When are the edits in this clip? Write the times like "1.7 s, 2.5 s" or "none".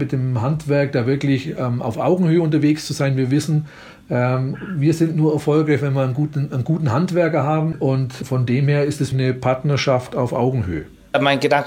7.7 s, 9.1 s

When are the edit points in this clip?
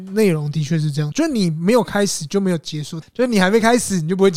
1.1 s, 3.0 s

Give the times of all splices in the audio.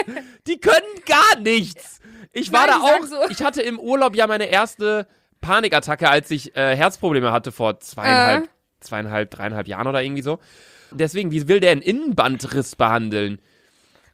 10.9 s

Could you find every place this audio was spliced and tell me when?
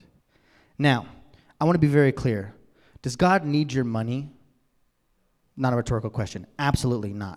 none

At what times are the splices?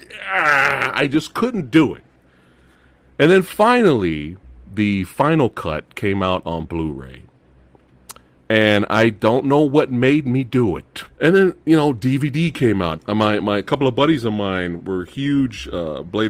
11.1 s, 13.0 s, 14.8 s

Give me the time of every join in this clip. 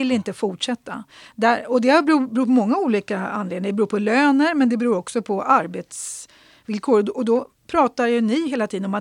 none

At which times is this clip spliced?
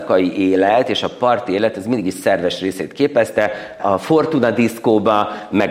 3.8 s

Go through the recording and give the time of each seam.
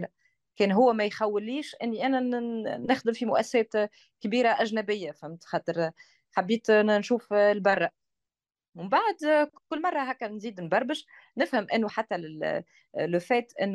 11.9 s

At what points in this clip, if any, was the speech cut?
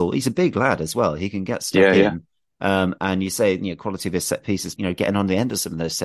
4.8 s

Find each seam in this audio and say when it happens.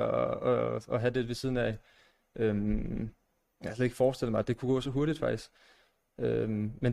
none

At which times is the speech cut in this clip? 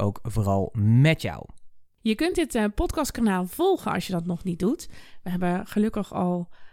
none

